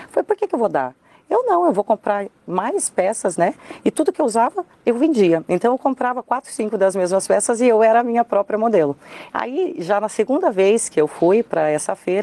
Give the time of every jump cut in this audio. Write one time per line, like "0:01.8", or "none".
none